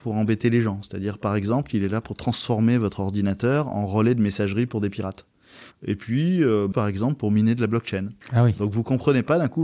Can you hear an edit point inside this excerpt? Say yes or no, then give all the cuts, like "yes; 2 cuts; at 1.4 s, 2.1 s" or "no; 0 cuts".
yes; 3 cuts; at 5.7 s, 6.7 s, 8.2 s